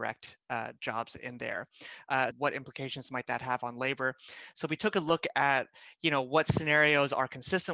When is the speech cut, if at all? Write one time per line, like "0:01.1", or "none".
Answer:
0:02.3